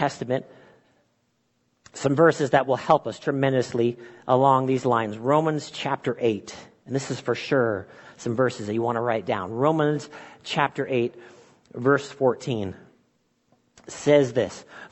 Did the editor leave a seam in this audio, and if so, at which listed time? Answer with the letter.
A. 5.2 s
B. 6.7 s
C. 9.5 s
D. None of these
D